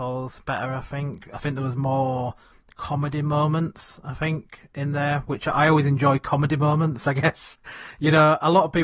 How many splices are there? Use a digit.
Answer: 0